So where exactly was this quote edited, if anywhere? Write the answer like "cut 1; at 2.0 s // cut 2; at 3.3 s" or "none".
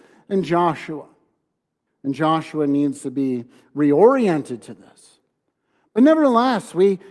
cut 1; at 1.9 s